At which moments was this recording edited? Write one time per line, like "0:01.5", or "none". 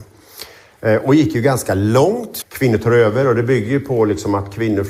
0:02.4